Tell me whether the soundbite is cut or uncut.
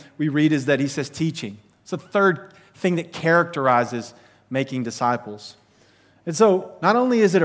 uncut